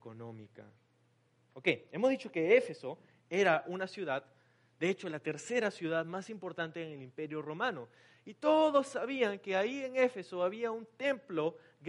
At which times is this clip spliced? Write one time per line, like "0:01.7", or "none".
0:01.5

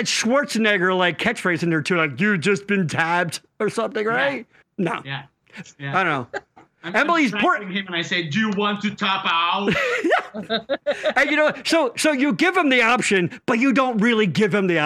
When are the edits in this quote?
0:04.6
0:05.6

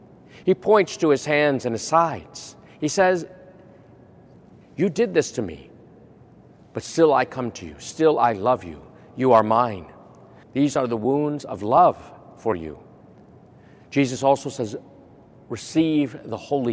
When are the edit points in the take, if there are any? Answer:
0:10.4

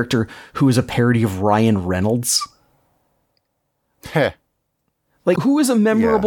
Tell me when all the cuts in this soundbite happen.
0:05.4

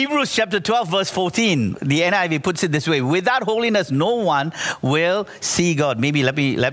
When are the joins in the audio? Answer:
0:01.7

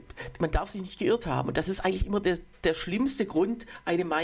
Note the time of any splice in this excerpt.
none

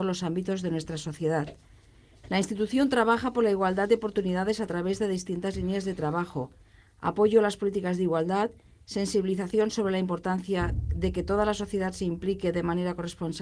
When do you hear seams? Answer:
none

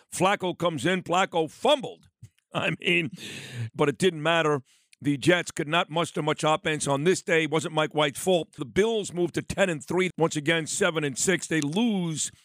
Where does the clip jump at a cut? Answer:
0:03.7
0:08.6
0:10.1

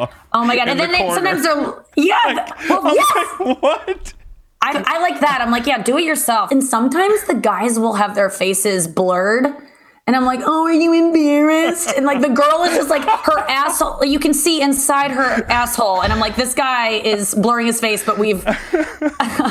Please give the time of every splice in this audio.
0:04.7

